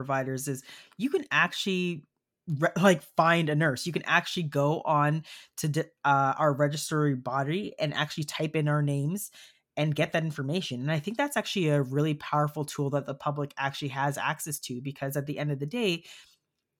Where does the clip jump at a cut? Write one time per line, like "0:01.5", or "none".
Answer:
none